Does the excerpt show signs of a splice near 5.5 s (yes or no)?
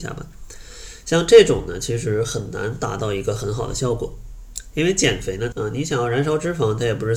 yes